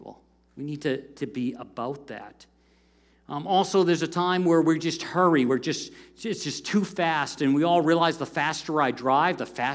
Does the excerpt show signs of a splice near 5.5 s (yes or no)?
no